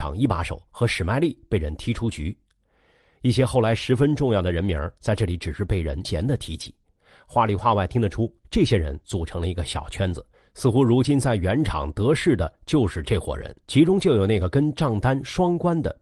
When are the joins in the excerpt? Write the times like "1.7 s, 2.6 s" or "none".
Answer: 6.0 s, 13.6 s